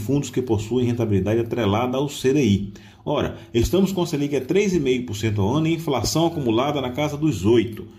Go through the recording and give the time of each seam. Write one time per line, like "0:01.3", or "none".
none